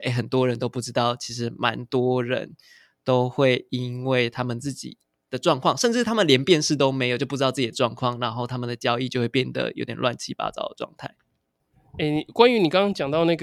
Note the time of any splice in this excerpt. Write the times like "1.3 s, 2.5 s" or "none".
none